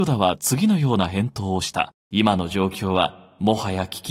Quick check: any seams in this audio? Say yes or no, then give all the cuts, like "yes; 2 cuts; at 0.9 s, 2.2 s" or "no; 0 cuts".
yes; 1 cut; at 2.0 s